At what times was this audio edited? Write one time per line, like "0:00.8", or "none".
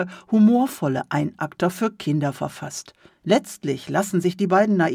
0:03.1